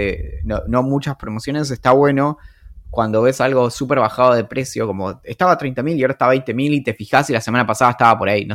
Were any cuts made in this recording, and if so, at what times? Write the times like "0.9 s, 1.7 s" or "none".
none

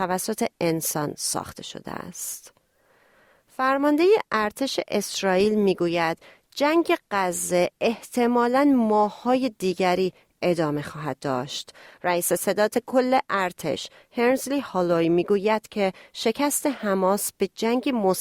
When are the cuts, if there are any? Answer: none

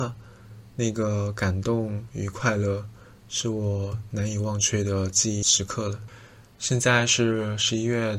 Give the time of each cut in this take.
none

